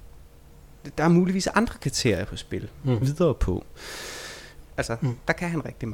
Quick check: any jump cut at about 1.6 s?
no; 2 cuts; at 3.0 s, 4.6 s

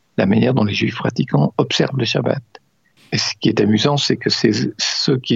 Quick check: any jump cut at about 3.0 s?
yes; 1 cut; at 3.0 s

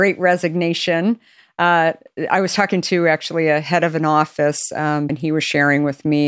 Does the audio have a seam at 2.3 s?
no; 1 cut; at 5.1 s

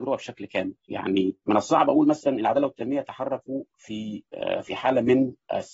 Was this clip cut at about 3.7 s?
no; 1 cut; at 1.4 s

